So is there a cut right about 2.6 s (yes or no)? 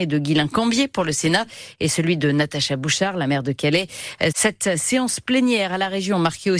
no